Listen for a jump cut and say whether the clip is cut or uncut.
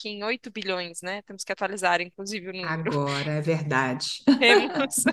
uncut